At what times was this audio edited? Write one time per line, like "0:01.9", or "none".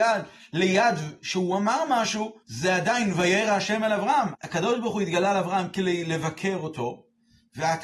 0:02.4
0:04.3